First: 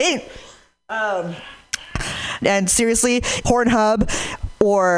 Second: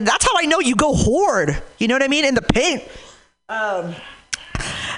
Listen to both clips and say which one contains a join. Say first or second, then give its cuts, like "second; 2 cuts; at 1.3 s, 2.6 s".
first; 2 cuts; at 2.4 s, 3.4 s